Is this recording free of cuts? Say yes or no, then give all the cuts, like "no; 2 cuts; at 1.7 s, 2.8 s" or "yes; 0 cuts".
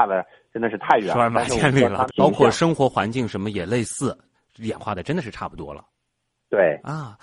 no; 2 cuts; at 2.1 s, 4.3 s